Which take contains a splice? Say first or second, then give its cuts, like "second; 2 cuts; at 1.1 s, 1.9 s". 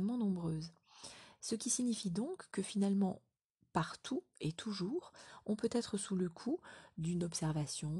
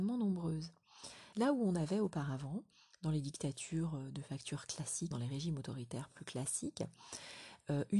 second; 2 cuts; at 1.3 s, 5.1 s